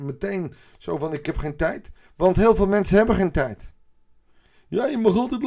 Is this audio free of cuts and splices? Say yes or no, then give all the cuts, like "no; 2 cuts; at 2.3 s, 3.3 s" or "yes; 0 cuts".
yes; 0 cuts